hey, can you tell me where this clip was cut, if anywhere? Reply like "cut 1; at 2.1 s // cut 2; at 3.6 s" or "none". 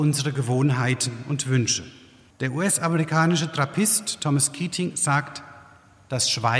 cut 1; at 2.3 s

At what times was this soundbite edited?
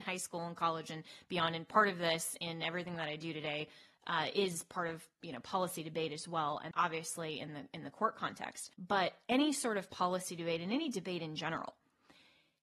cut 1; at 6.7 s // cut 2; at 8.7 s

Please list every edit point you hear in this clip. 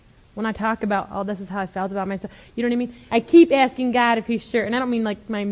cut 1; at 3.1 s

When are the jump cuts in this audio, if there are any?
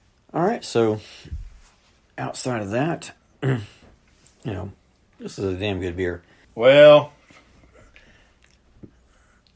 cut 1; at 5.1 s // cut 2; at 6.4 s

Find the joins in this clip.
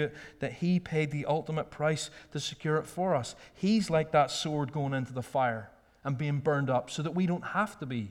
none

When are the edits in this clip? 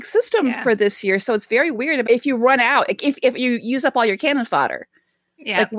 cut 1; at 2.1 s

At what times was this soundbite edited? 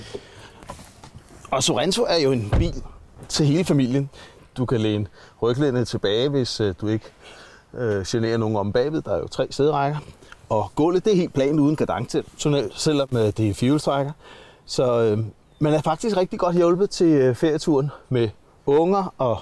cut 1; at 4.4 s

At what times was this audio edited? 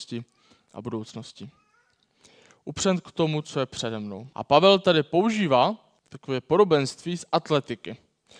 cut 1; at 4.3 s // cut 2; at 6.0 s

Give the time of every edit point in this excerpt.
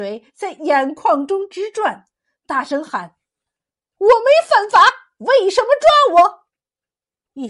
none

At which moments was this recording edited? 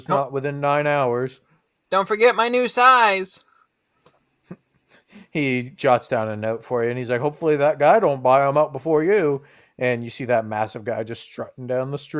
none

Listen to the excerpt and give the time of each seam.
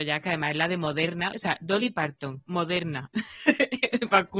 cut 1; at 1.3 s

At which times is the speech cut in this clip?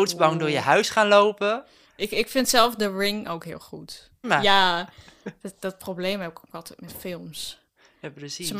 cut 1; at 4.2 s

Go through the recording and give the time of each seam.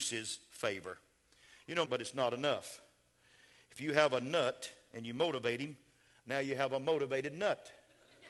cut 1; at 1.9 s

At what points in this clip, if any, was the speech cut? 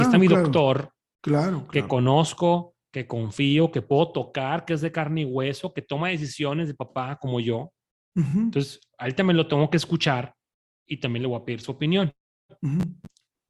none

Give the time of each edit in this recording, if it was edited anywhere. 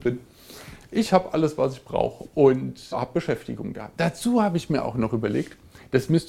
cut 1; at 2.9 s

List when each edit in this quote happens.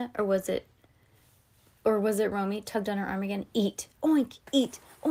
none

